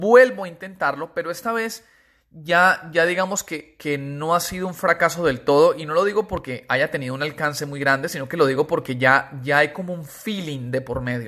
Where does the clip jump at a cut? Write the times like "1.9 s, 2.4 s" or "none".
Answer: none